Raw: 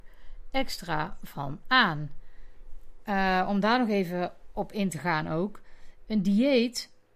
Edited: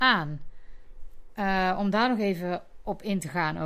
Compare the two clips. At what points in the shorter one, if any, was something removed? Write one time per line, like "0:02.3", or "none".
none